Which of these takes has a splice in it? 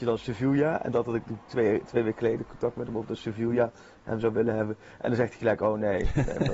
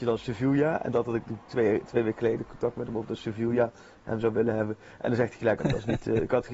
second; 1 cut; at 5.6 s

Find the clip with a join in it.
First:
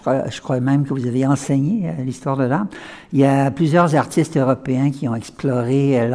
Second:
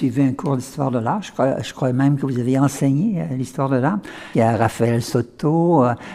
second; 1 cut; at 4.3 s

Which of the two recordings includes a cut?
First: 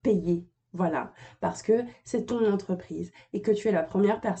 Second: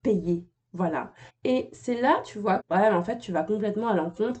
second; 2 cuts; at 1.3 s, 2.6 s

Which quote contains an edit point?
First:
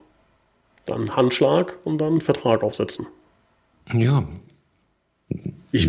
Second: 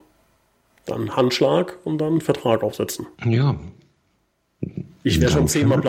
second; 1 cut; at 3.1 s

